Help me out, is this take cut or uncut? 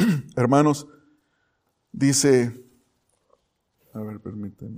uncut